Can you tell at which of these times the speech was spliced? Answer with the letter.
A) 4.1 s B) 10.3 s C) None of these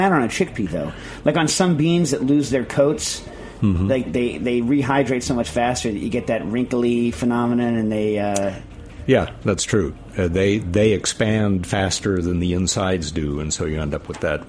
A